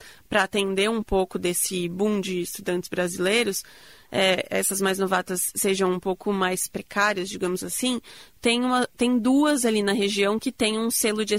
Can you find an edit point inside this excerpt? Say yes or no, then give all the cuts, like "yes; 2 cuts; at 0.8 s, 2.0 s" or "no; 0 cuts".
no; 0 cuts